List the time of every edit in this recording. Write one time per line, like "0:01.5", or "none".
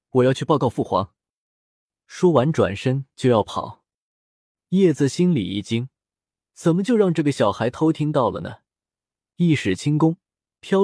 none